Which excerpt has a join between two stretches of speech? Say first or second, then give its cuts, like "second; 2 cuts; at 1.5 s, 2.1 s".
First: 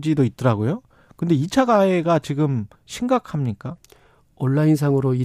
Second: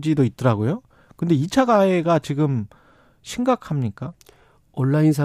first; 1 cut; at 2.8 s